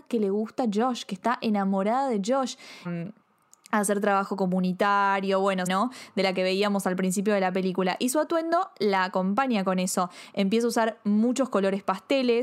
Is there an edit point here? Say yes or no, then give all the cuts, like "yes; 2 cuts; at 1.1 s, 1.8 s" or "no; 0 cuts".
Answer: yes; 2 cuts; at 2.8 s, 5.7 s